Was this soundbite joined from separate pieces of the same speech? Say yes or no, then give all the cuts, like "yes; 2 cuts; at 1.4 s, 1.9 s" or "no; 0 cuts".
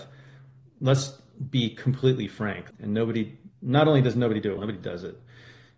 yes; 2 cuts; at 2.7 s, 4.6 s